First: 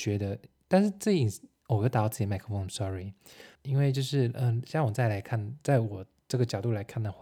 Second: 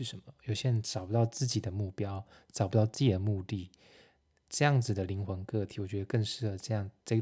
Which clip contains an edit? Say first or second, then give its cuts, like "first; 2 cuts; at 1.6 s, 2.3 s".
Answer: first; 1 cut; at 3.6 s